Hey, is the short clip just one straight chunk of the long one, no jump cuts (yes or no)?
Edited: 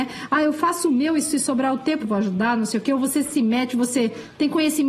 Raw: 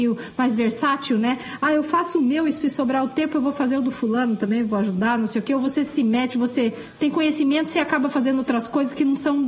no